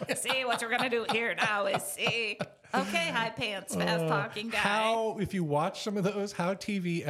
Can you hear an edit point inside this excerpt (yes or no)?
no